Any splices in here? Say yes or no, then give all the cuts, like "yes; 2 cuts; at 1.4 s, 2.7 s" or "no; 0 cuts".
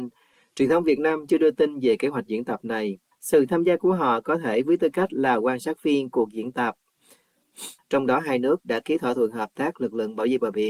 yes; 2 cuts; at 3.1 s, 7.8 s